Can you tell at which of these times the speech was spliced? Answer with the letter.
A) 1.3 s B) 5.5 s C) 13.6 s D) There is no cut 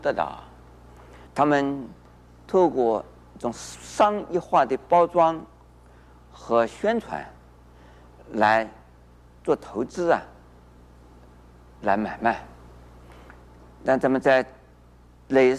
A